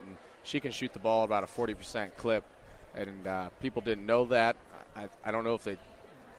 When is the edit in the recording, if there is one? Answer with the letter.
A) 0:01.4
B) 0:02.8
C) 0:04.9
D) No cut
D